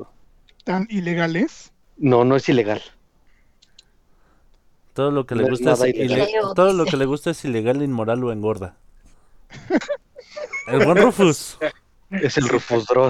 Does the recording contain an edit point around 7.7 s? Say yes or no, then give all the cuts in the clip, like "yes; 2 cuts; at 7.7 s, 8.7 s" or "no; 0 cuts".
no; 1 cut; at 9.8 s